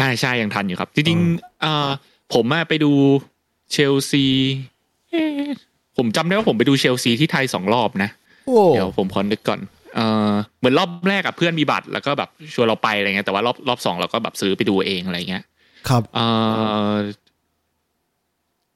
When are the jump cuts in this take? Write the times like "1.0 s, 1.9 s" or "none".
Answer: none

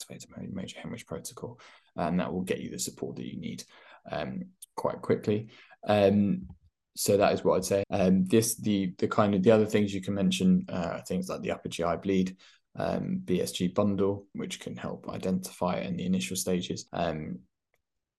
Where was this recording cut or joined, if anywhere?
7.8 s, 14.3 s, 16.9 s

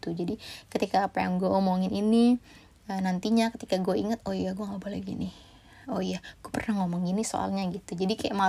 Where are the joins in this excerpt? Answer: none

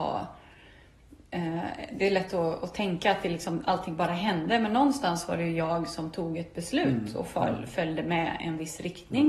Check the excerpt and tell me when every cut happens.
none

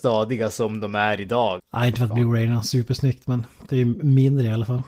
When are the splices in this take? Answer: 1.6 s

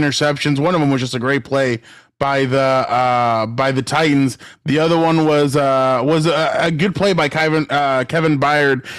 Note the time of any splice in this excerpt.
none

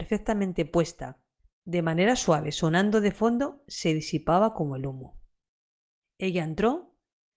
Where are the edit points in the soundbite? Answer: 1.5 s, 6.0 s

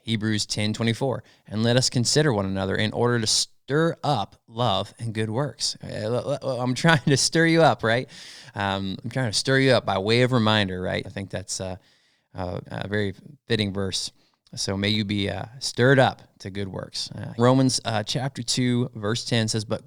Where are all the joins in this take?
11.0 s, 12.6 s, 17.4 s

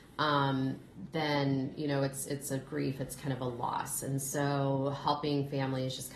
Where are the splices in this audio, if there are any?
none

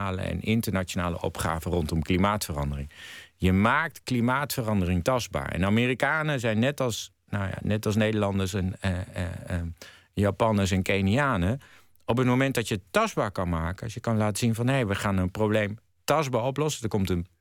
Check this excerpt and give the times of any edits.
none

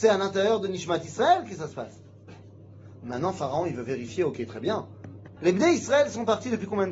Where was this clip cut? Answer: 5.4 s

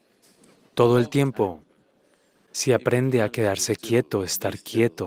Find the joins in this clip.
none

